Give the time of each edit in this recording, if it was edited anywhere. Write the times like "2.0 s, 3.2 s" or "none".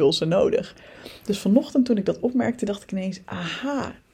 none